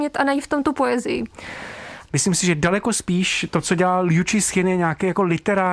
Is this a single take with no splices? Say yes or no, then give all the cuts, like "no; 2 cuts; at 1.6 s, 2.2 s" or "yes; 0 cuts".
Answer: no; 1 cut; at 2.1 s